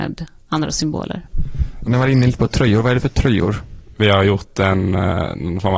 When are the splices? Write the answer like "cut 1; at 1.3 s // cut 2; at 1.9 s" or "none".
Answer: cut 1; at 1.9 s // cut 2; at 3.9 s